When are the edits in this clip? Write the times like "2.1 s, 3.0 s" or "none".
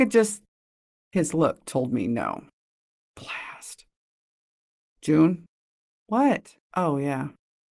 6.6 s

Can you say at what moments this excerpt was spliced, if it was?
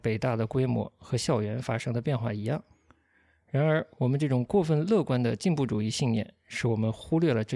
none

